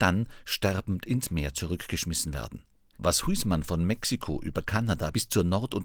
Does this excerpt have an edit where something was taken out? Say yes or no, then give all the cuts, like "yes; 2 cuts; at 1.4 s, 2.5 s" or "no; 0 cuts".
yes; 1 cut; at 2.9 s